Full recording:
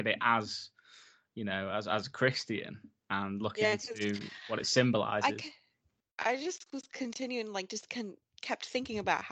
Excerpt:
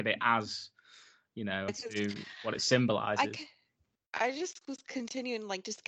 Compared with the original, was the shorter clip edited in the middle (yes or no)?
yes